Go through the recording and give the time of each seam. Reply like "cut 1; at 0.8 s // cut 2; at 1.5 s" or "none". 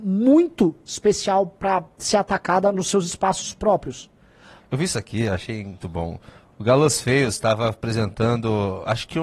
cut 1; at 4.6 s // cut 2; at 5.8 s